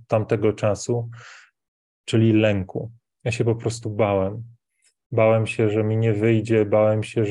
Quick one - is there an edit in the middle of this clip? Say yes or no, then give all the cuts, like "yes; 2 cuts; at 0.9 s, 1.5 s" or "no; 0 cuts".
no; 0 cuts